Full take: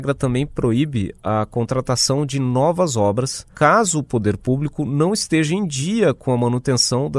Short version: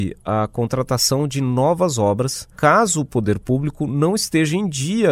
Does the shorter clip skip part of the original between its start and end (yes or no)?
no